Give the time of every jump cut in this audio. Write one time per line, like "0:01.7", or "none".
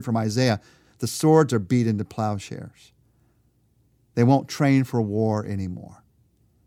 none